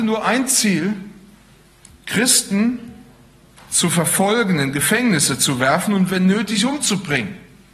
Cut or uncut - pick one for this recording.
uncut